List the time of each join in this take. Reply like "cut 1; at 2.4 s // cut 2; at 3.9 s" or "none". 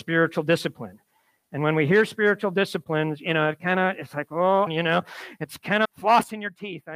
cut 1; at 4.7 s // cut 2; at 5.8 s